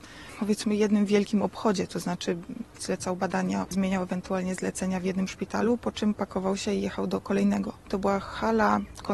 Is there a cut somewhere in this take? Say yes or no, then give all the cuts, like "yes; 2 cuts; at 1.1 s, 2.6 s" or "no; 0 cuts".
yes; 2 cuts; at 3.6 s, 7.9 s